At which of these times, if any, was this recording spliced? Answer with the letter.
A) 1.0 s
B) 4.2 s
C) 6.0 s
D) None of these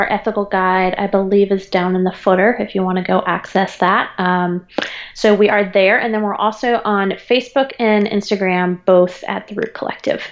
D